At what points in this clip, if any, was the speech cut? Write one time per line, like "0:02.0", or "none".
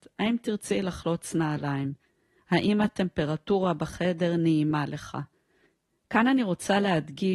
none